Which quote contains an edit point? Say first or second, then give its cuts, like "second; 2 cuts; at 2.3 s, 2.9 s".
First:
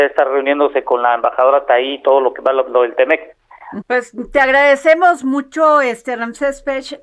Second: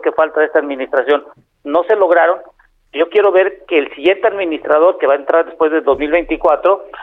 first; 1 cut; at 3.8 s